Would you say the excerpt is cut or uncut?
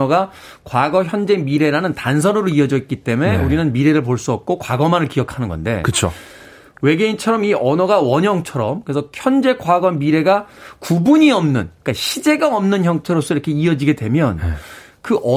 uncut